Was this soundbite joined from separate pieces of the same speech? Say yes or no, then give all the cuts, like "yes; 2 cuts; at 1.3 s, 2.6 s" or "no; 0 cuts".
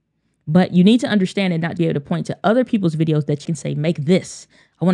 yes; 2 cuts; at 1.8 s, 3.5 s